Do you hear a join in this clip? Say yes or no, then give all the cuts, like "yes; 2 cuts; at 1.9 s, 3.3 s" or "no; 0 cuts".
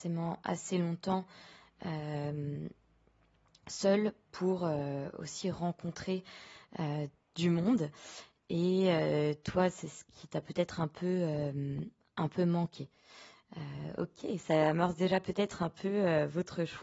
no; 0 cuts